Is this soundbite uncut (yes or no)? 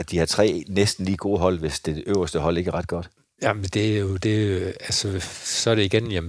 yes